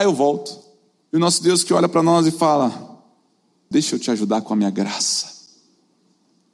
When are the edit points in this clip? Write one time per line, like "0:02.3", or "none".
0:01.1
0:03.7